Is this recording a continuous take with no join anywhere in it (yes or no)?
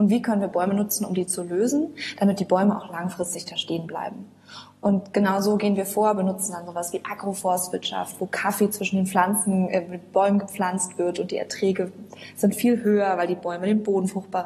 yes